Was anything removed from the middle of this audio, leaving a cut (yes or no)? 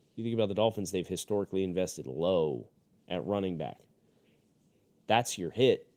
no